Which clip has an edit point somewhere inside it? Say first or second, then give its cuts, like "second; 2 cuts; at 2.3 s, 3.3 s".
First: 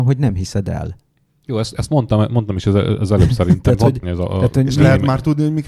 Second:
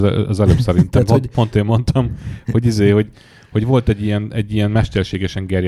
first; 1 cut; at 4.0 s